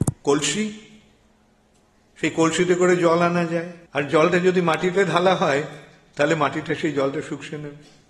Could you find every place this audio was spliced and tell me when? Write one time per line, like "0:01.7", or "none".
0:03.9